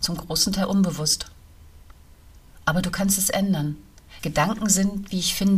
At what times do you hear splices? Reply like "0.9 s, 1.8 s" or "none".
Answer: 4.2 s